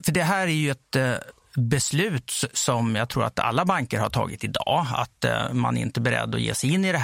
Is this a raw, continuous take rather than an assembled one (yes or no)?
yes